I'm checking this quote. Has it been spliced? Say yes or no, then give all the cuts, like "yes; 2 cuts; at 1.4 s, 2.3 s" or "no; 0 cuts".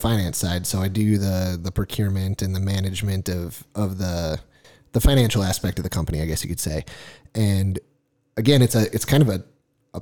no; 0 cuts